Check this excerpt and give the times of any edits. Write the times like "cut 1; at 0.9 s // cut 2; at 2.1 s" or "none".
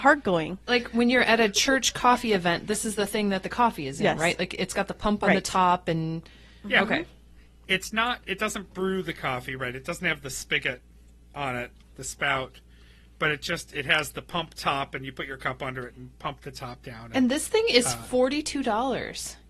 none